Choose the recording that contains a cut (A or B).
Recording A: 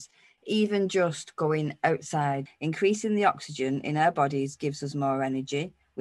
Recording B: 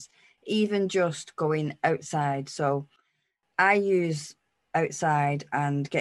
A